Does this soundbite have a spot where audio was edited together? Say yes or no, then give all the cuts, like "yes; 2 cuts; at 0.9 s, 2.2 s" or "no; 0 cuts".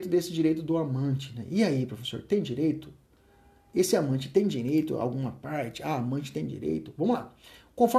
no; 0 cuts